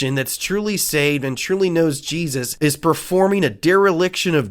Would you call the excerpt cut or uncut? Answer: uncut